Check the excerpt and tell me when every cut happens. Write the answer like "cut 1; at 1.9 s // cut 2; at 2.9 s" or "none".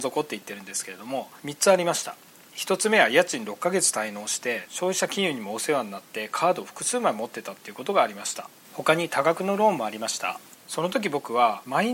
none